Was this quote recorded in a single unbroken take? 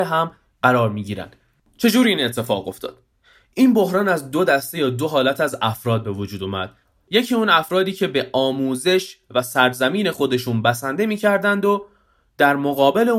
yes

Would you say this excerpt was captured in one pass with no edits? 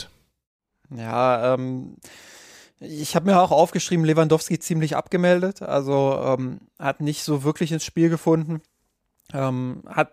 yes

